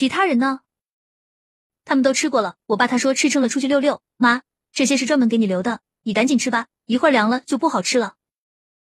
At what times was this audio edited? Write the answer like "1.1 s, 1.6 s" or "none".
2.6 s